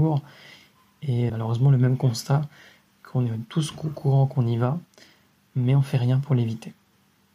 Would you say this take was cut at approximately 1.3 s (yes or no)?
yes